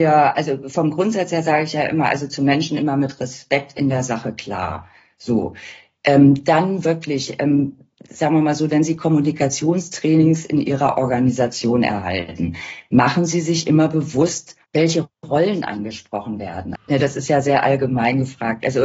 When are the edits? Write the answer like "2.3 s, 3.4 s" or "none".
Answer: 8.7 s, 14.6 s, 16.7 s